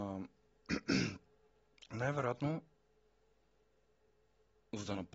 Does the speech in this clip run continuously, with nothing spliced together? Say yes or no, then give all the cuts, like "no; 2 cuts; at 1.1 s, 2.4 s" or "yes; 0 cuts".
yes; 0 cuts